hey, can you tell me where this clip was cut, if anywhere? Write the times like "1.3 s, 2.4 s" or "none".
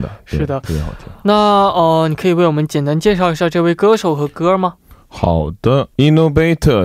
5.9 s